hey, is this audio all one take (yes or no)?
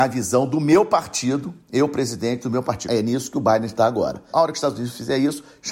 no